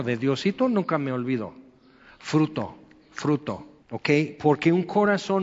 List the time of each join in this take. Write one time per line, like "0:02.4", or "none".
0:03.8